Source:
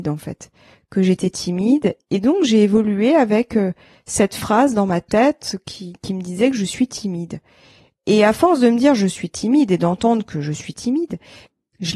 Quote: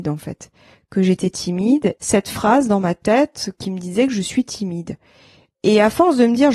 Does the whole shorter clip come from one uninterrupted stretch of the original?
no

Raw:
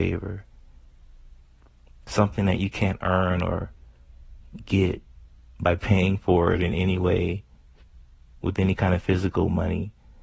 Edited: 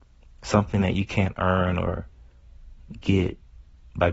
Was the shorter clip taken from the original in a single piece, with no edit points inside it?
yes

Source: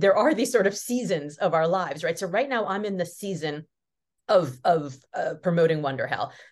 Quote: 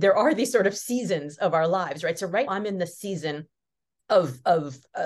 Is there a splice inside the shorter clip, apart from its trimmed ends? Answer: yes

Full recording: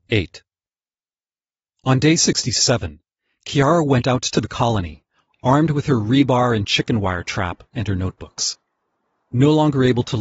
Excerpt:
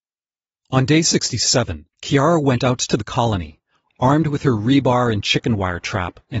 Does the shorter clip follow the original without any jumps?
no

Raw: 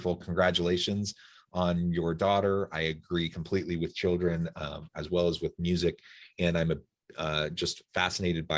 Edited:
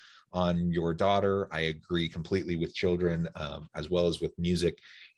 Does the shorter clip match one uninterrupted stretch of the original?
yes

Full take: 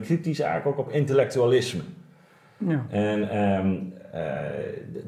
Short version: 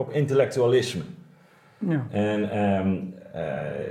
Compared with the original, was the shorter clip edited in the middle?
no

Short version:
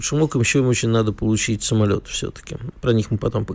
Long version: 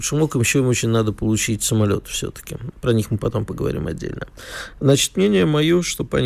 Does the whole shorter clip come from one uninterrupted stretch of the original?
yes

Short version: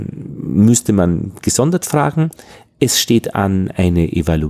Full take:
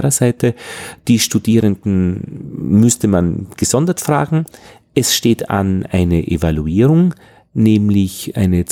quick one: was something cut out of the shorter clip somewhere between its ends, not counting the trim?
no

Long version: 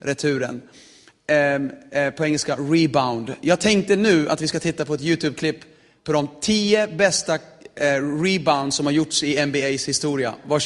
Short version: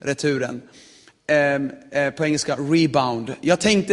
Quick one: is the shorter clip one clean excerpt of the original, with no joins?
yes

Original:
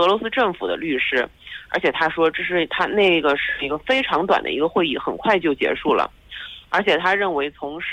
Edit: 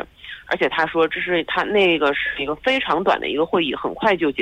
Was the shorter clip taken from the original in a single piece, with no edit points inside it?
yes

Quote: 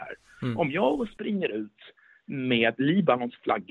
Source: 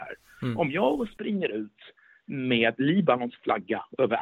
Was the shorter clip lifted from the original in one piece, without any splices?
yes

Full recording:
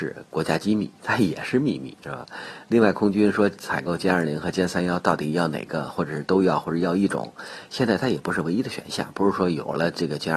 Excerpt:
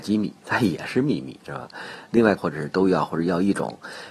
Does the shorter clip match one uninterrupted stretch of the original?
no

